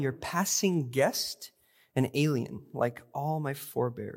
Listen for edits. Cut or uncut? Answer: uncut